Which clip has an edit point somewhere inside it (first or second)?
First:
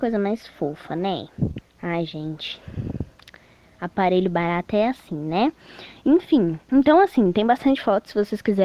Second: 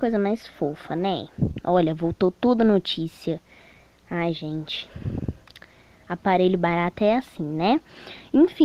first